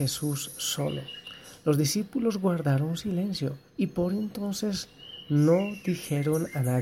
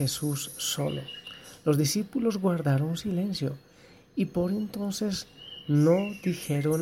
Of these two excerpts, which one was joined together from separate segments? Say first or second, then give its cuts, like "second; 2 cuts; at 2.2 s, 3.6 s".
first; 1 cut; at 3.7 s